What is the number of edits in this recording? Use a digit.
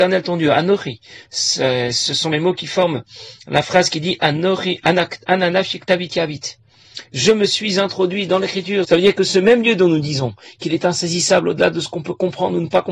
1